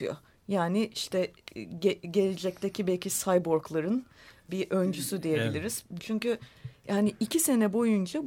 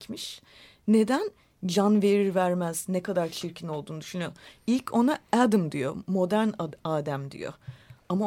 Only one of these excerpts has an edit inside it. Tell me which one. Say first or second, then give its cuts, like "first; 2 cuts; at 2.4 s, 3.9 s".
first; 2 cuts; at 4.5 s, 6.0 s